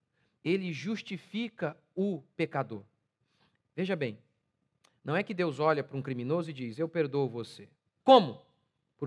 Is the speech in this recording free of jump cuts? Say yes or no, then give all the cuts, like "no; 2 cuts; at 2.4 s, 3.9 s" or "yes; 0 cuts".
no; 1 cut; at 8.0 s